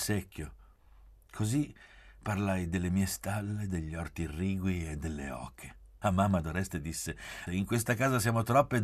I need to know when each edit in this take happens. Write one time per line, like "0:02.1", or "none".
0:06.0
0:07.5